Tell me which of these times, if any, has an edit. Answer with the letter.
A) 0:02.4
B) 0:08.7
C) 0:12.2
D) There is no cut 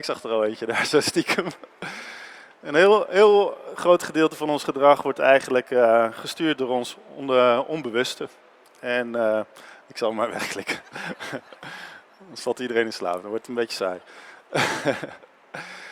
D